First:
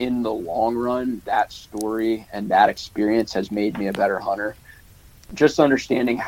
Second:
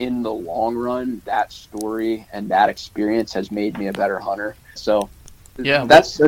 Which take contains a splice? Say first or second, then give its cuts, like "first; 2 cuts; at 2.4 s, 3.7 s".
second; 1 cut; at 4.8 s